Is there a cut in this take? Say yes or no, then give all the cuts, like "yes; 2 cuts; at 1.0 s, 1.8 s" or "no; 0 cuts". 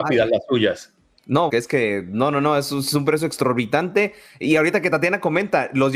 yes; 1 cut; at 1.5 s